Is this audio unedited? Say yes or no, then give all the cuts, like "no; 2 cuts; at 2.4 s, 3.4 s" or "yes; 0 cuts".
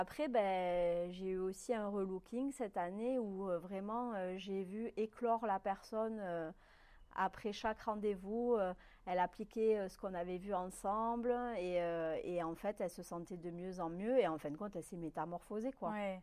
yes; 0 cuts